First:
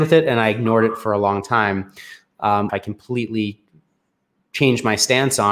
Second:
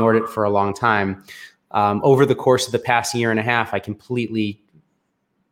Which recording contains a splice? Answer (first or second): first